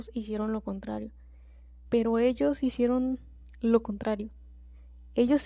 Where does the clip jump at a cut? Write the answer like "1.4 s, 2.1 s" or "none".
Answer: 1.8 s